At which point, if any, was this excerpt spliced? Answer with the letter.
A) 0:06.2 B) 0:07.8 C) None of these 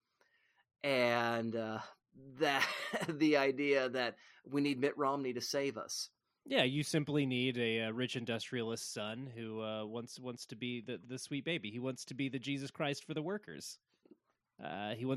C